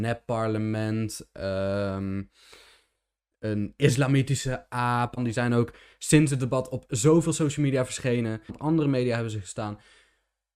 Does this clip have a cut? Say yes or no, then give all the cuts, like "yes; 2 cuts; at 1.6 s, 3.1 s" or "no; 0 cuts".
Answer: yes; 2 cuts; at 5.2 s, 8.5 s